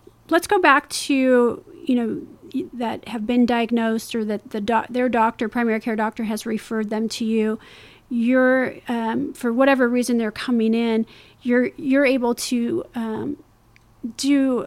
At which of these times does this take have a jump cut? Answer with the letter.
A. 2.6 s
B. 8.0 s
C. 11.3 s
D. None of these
A